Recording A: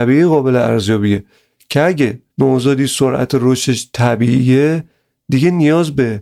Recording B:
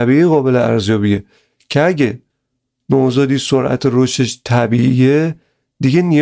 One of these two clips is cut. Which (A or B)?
A